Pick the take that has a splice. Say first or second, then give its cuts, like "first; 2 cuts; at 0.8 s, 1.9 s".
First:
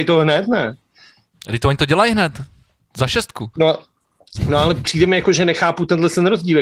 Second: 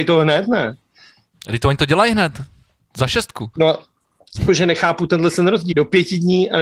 second; 2 cuts; at 4.5 s, 5.7 s